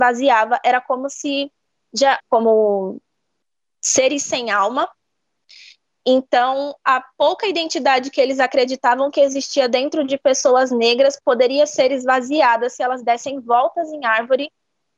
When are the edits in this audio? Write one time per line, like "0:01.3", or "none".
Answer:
0:02.2